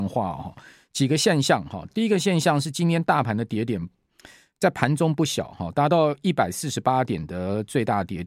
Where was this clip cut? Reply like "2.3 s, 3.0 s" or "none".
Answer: none